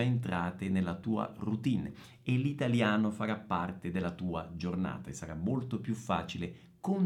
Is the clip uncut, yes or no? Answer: yes